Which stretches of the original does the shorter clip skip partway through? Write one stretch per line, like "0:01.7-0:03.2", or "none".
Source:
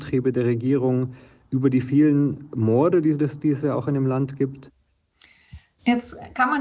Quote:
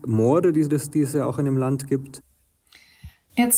none